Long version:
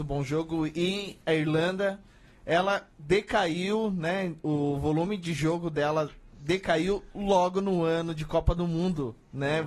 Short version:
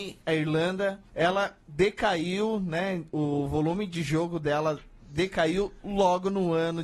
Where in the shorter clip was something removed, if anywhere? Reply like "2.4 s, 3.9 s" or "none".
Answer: 1.1 s